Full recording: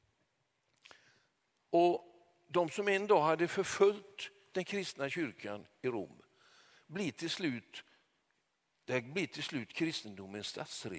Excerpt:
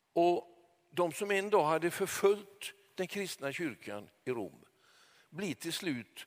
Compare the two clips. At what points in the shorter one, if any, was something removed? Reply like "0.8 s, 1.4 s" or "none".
none